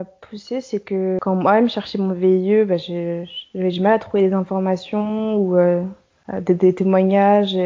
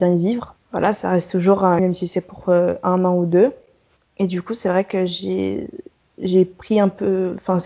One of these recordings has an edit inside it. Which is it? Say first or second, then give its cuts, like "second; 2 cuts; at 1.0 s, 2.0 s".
second; 1 cut; at 1.8 s